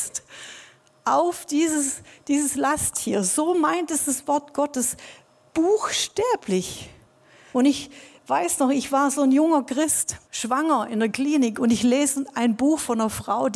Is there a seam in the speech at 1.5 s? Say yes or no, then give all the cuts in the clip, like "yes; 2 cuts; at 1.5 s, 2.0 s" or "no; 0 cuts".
no; 2 cuts; at 7.5 s, 10.2 s